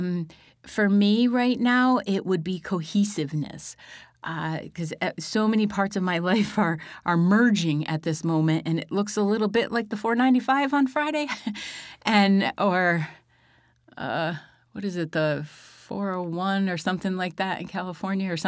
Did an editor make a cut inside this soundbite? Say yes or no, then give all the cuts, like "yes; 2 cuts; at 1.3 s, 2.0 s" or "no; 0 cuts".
no; 0 cuts